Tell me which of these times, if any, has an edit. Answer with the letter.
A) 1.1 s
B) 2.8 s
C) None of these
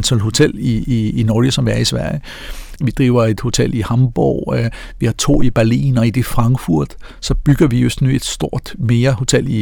B